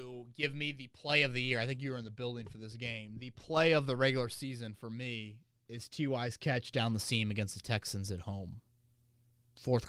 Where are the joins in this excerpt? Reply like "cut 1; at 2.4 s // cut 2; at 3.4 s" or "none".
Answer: none

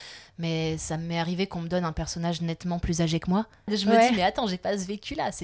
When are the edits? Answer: cut 1; at 3.7 s

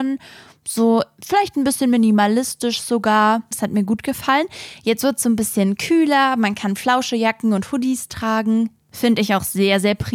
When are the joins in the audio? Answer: cut 1; at 3.5 s

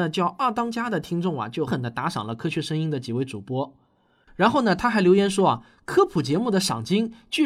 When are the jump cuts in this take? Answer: cut 1; at 1.7 s

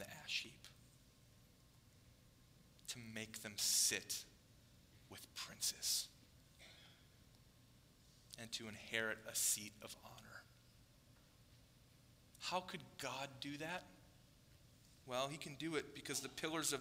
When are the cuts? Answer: none

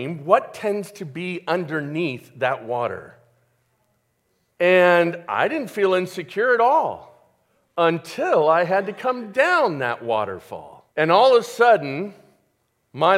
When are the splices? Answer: cut 1; at 4.5 s // cut 2; at 10.9 s

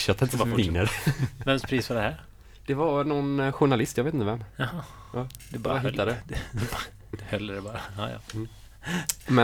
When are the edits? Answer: none

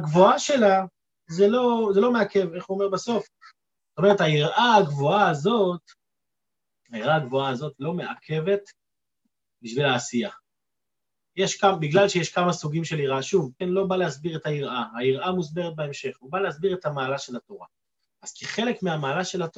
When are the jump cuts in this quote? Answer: cut 1; at 3.8 s // cut 2; at 13.6 s

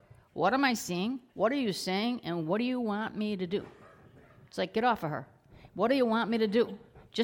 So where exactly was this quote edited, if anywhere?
cut 1; at 1.3 s

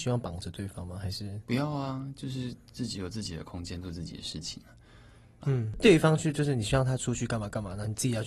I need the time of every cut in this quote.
cut 1; at 5.4 s

